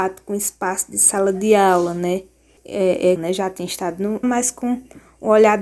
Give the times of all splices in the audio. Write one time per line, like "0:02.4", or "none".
0:03.2
0:04.2